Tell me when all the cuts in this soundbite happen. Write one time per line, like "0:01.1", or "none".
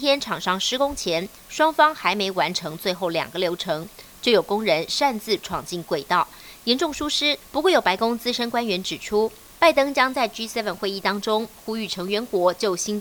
0:07.4